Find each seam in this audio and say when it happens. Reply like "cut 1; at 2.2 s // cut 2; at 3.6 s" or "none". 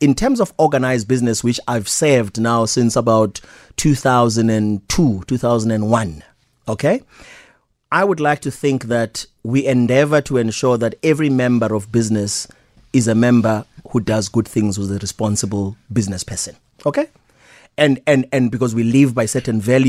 none

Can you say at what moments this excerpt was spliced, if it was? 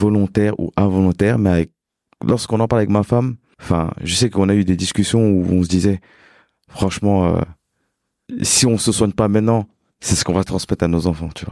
none

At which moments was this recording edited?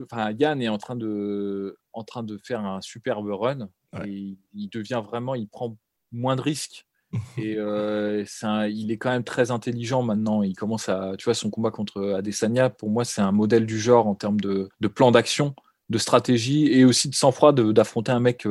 cut 1; at 14.7 s

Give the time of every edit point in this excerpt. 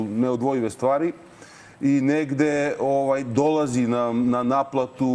none

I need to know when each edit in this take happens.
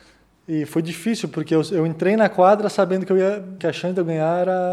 cut 1; at 3.6 s

